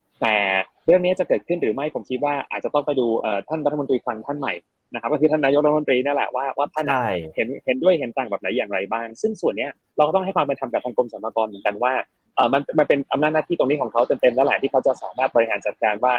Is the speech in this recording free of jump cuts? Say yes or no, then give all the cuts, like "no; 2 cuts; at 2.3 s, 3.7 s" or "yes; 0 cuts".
yes; 0 cuts